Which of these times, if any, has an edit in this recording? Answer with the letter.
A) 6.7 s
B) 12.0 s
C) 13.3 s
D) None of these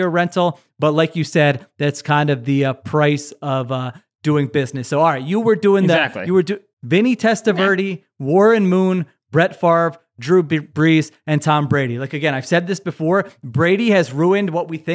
A